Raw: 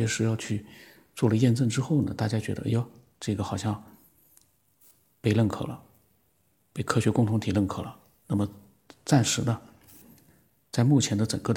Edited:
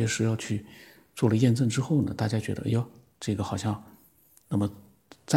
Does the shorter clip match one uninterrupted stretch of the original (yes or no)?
no